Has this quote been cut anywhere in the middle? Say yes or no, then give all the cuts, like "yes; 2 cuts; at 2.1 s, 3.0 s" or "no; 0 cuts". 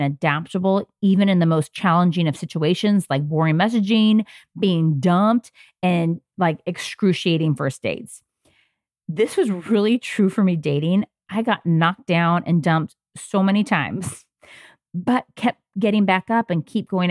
no; 0 cuts